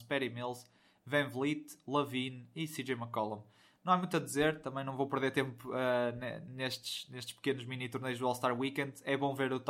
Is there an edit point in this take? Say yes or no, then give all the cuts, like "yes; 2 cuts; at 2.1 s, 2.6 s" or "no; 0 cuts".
no; 0 cuts